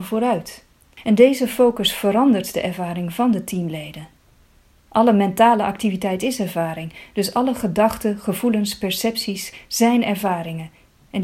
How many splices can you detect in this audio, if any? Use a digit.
0